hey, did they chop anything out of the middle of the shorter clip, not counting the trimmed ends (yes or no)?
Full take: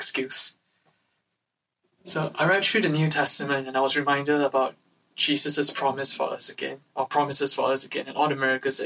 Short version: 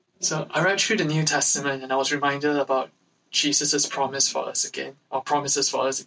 no